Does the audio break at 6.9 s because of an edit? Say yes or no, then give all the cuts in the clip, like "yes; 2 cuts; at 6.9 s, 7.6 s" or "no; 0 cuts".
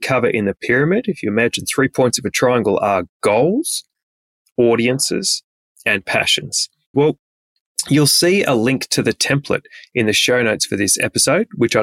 yes; 1 cut; at 6.9 s